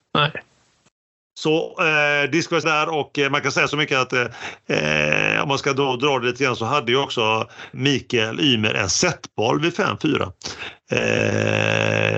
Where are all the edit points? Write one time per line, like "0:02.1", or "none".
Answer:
0:02.6
0:07.7